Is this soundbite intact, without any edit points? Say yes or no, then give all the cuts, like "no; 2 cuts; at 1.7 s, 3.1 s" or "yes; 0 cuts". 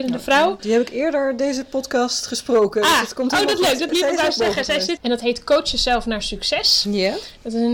no; 2 cuts; at 3.9 s, 5.0 s